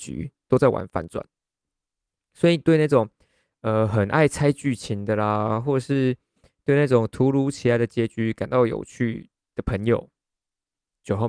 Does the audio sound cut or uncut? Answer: uncut